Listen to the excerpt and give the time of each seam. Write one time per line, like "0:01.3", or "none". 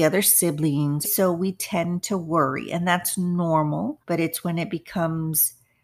0:01.0
0:04.0